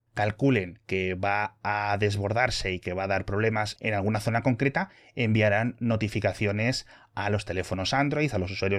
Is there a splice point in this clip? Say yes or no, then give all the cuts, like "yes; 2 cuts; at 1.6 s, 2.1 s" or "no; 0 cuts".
no; 0 cuts